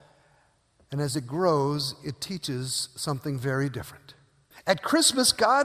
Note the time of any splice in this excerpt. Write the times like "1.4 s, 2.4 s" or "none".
4.5 s